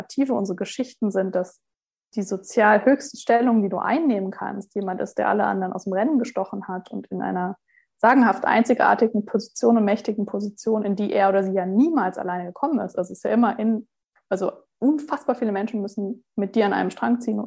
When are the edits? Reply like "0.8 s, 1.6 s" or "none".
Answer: none